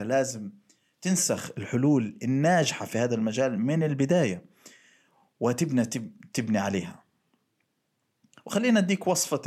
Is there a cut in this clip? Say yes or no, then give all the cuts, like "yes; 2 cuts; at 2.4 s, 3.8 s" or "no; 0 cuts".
no; 0 cuts